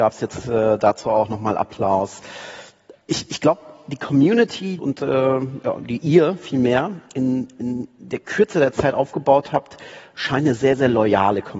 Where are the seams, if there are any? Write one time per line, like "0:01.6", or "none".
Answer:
0:03.0
0:04.8